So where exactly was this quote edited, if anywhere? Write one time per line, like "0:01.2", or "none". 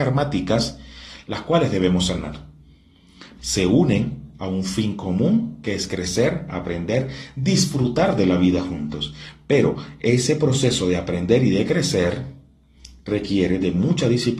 0:03.4